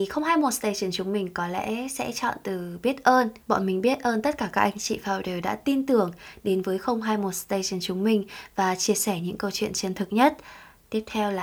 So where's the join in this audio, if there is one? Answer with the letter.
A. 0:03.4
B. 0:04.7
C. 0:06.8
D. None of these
A